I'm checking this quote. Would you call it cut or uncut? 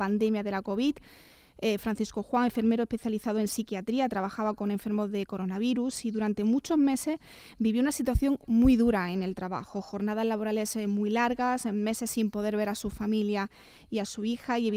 uncut